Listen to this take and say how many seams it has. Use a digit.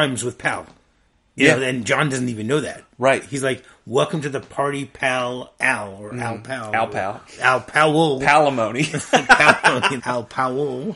2